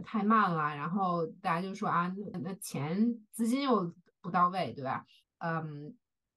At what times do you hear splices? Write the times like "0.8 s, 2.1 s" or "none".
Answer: 2.3 s, 5.2 s

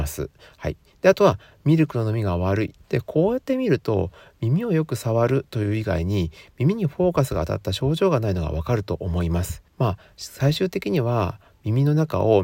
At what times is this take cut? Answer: 2.8 s, 9.7 s

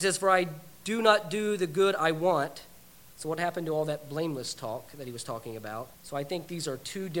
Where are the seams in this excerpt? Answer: 5.9 s

